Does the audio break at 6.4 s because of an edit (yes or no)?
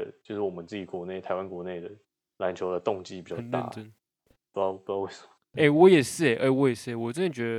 no